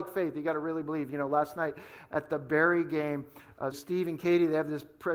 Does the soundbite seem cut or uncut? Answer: cut